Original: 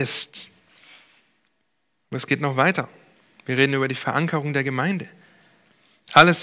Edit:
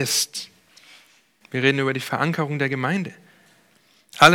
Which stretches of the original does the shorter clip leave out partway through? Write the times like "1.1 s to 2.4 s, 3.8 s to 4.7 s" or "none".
1.4 s to 3.4 s